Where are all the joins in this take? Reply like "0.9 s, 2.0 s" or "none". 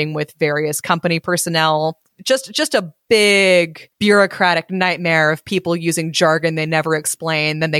2.1 s, 3.9 s

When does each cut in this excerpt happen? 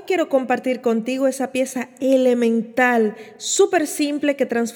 none

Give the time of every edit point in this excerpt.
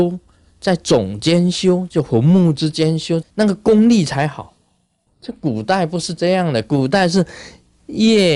3.2 s, 5.1 s

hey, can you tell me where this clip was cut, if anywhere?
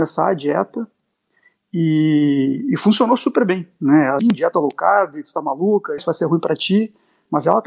4.2 s, 6.0 s

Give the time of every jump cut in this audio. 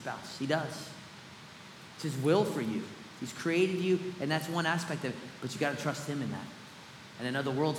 none

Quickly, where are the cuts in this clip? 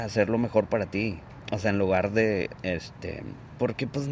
2.6 s

